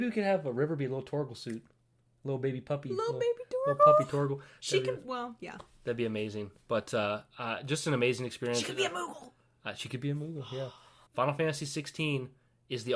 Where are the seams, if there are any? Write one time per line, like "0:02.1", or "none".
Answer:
0:11.1